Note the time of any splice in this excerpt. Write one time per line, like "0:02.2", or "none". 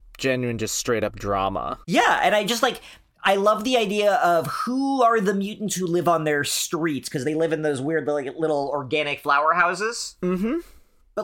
0:01.8